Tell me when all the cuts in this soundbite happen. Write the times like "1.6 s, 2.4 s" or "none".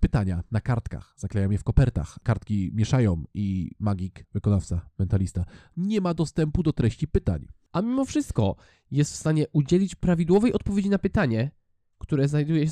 4.2 s